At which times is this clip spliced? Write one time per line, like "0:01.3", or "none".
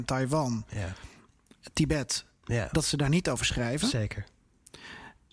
none